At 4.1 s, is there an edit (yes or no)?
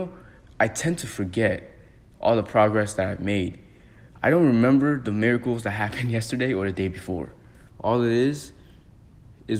no